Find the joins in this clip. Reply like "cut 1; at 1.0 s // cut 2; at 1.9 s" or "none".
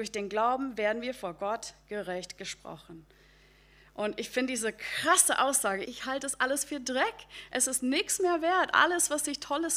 cut 1; at 5.8 s